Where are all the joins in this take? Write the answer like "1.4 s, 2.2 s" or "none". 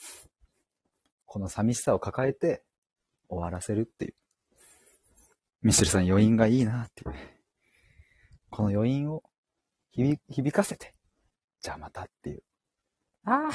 none